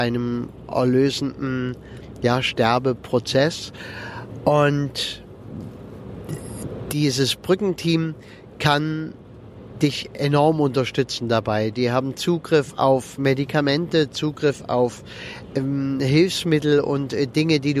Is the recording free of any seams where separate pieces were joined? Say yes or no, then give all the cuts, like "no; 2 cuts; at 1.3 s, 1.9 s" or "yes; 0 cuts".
yes; 0 cuts